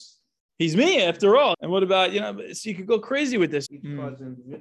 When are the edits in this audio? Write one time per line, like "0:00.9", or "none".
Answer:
0:01.5
0:03.7